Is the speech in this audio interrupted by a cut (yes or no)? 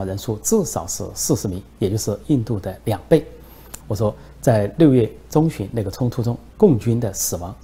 yes